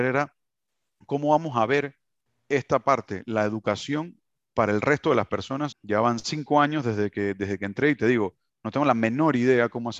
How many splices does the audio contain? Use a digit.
1